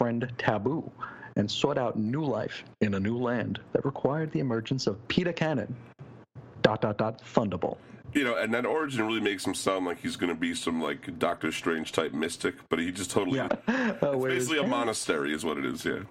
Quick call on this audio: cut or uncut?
cut